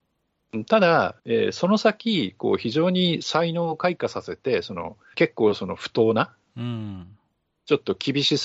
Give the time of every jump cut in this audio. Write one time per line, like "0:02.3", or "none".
0:01.2
0:05.1